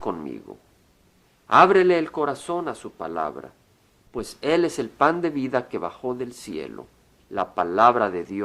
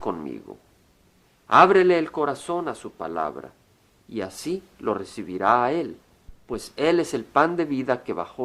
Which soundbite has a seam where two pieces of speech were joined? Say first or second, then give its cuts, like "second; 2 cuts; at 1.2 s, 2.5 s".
first; 1 cut; at 4.1 s